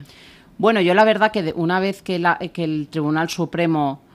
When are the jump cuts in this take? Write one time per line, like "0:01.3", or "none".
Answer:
none

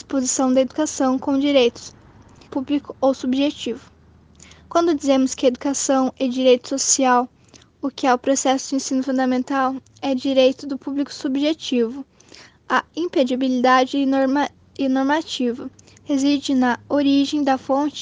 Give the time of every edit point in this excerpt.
0:02.5

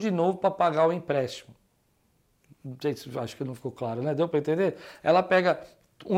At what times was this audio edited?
none

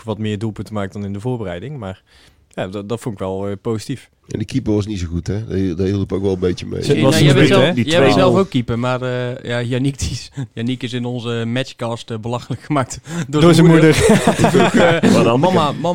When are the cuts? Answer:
none

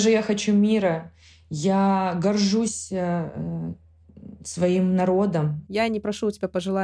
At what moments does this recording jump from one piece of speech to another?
0:05.7

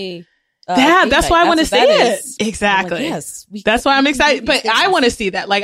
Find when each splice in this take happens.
0:02.4

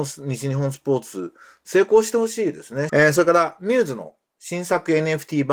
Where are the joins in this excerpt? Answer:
0:02.9

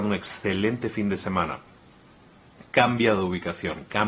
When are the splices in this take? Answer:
none

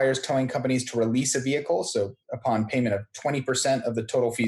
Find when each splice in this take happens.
0:02.2

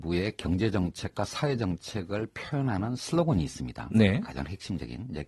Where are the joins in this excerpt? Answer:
none

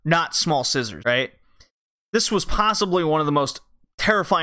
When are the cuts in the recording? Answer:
0:01.0

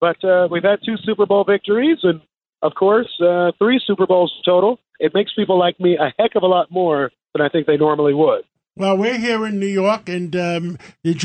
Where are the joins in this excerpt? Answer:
none

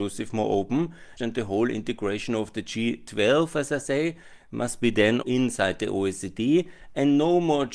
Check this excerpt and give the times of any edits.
0:01.2
0:05.2

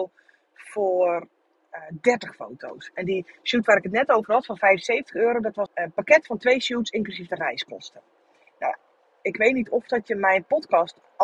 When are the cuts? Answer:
0:05.7

